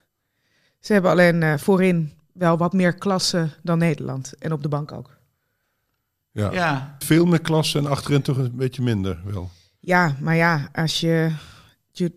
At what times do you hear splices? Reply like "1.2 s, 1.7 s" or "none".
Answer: 7.0 s